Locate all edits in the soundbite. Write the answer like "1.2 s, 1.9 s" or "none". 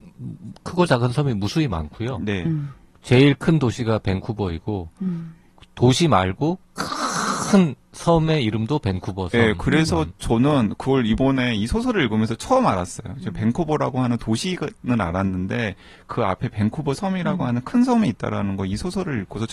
none

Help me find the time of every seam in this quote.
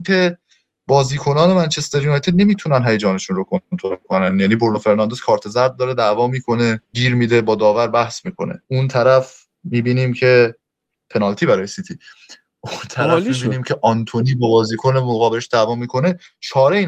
6.8 s, 8.6 s

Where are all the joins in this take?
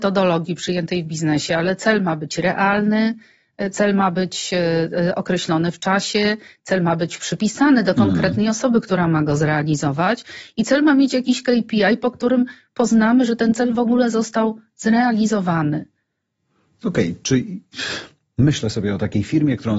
none

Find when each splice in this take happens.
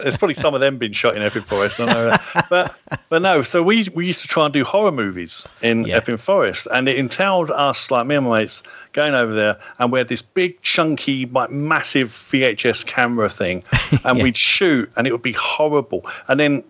none

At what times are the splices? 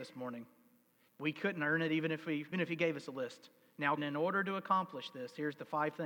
1.1 s, 2.5 s, 4.0 s

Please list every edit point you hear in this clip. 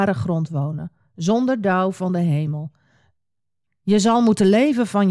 none

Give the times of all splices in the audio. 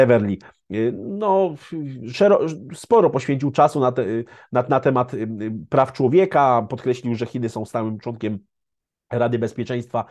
none

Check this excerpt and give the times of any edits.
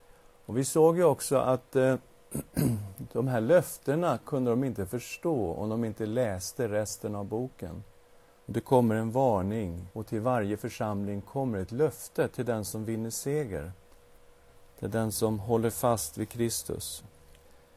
8.4 s, 9.9 s

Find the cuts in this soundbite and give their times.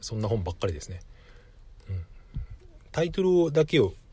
none

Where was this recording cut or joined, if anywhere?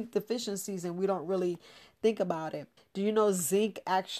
2.8 s

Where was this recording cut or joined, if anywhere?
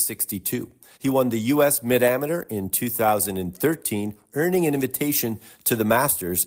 none

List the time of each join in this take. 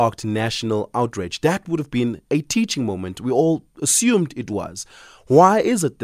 none

